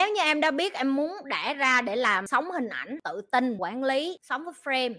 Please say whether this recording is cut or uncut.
cut